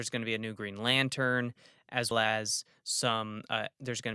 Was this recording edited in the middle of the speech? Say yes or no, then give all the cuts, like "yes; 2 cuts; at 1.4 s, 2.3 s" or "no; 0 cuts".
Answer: yes; 1 cut; at 2.1 s